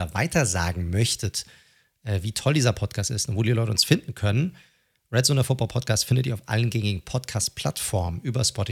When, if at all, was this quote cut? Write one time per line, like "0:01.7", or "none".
none